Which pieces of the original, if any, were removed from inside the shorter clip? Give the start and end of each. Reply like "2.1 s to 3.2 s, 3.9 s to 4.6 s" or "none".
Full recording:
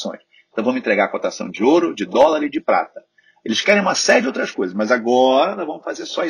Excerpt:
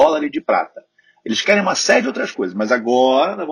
none

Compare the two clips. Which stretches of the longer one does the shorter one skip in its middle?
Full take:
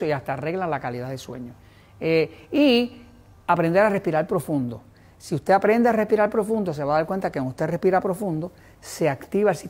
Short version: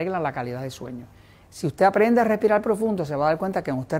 1.9 s to 5.1 s

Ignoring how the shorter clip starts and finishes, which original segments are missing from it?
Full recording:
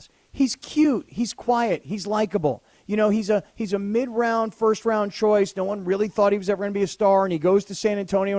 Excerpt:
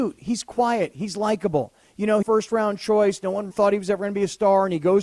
3.1 s to 4.6 s, 5.8 s to 6.1 s

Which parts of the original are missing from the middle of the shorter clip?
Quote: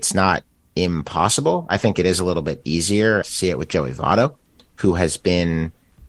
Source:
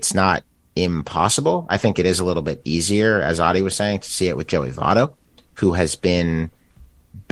3.2 s to 4.0 s

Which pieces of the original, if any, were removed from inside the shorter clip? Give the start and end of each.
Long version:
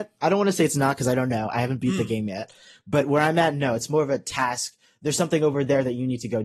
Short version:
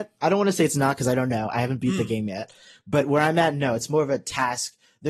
none

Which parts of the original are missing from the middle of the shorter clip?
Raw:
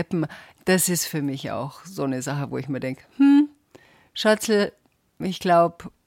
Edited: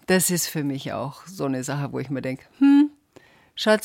none

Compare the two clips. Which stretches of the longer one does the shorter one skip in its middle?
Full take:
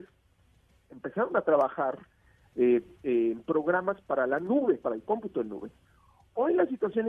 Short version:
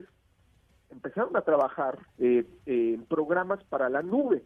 2.1 s to 2.5 s

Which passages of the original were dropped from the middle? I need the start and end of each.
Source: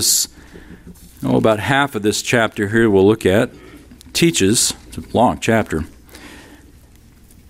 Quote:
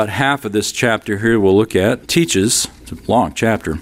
3.5 s to 4.1 s

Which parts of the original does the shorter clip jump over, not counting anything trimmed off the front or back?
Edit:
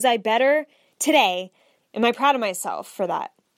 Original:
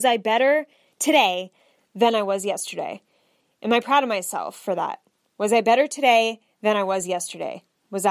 1.8 s to 3.5 s

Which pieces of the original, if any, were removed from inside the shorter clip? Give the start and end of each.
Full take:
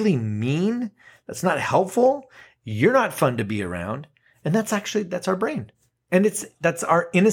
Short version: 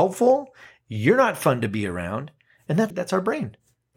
4.7 s to 5.1 s

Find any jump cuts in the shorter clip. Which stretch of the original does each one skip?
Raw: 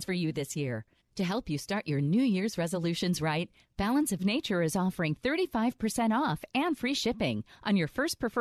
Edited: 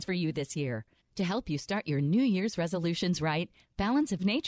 none

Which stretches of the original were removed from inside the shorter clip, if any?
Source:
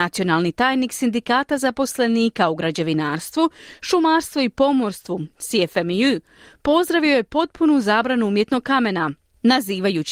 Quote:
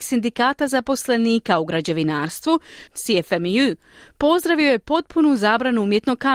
3.8 s to 5.3 s

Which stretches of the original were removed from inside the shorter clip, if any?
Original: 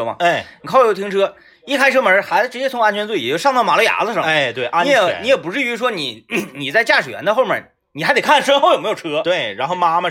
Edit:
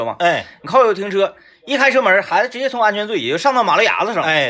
none

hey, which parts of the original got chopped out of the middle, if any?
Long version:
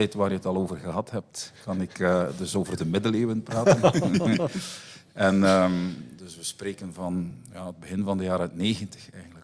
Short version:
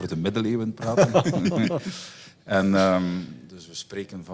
none

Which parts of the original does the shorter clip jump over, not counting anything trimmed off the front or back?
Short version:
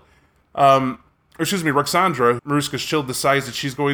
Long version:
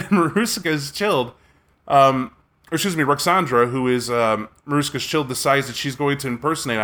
3.7 s to 4.6 s

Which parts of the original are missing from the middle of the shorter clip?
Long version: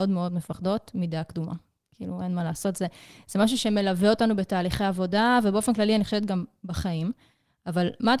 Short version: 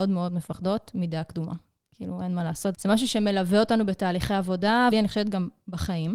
2.7 s to 3.2 s, 5.4 s to 5.9 s

